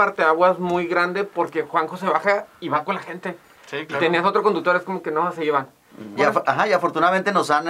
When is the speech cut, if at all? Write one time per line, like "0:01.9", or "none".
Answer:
0:06.2